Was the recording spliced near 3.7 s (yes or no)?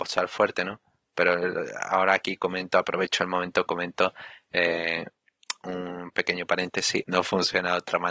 no